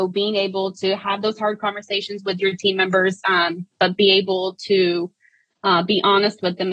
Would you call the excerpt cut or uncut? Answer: uncut